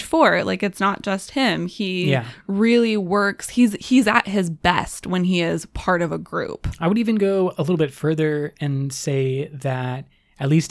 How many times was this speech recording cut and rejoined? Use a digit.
0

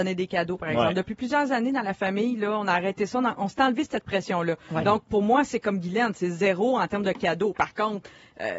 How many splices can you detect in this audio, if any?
0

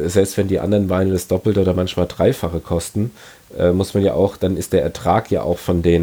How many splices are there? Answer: 0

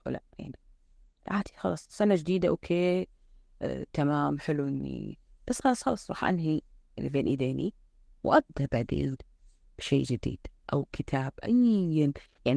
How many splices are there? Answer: 0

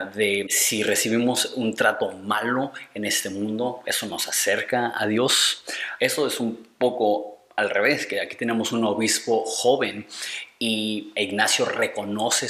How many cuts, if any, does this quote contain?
2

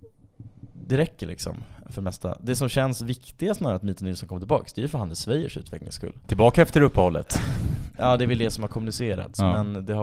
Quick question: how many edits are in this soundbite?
1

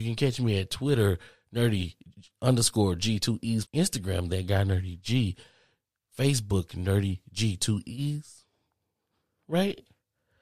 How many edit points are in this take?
1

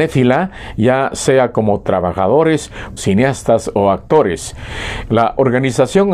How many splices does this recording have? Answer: 2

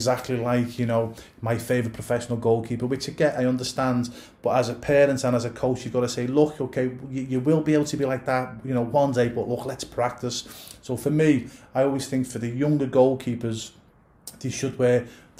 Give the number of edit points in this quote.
0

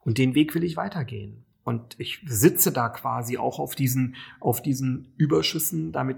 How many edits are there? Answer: 0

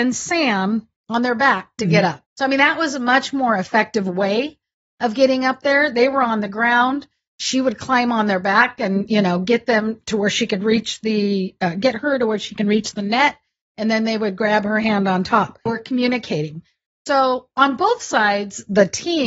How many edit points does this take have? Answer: 2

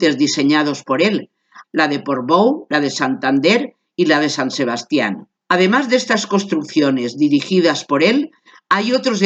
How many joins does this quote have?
2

